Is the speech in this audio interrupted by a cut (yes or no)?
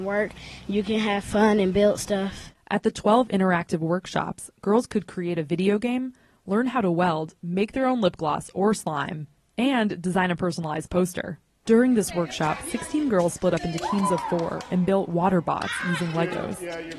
yes